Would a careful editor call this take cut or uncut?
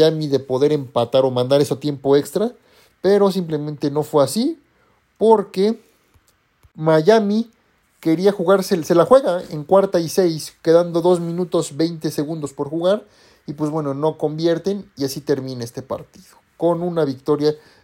uncut